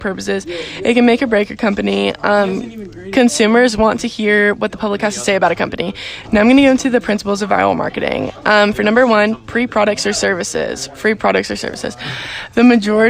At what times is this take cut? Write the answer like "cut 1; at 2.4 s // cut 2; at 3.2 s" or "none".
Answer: cut 1; at 6.2 s